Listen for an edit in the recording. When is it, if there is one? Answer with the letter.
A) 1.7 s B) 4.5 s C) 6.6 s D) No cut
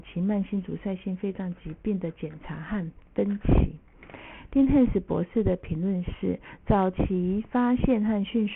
C